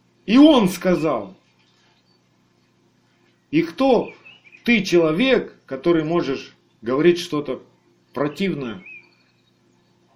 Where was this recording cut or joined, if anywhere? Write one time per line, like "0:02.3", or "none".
none